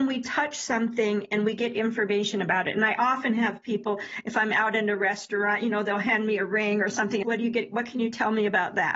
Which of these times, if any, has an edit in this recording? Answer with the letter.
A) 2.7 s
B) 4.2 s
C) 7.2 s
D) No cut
C